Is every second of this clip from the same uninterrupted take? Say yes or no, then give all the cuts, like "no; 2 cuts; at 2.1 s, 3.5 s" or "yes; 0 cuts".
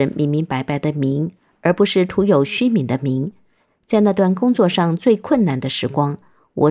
yes; 0 cuts